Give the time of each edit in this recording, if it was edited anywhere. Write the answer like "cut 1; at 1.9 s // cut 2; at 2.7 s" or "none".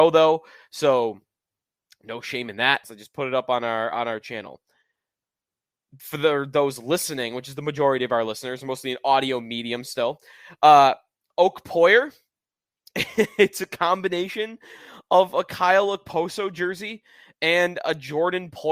cut 1; at 2.8 s